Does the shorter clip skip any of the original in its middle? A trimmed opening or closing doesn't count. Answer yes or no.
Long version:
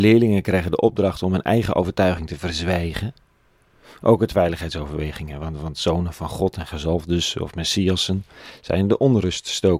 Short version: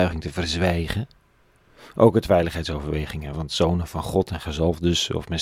yes